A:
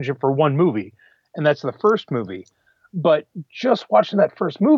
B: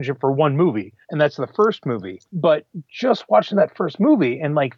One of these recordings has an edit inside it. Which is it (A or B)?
B